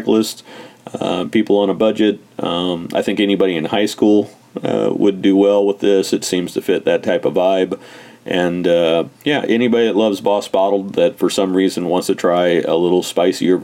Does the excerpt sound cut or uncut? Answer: cut